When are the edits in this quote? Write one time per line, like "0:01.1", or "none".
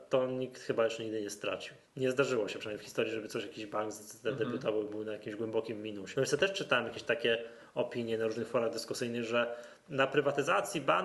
0:01.9
0:06.1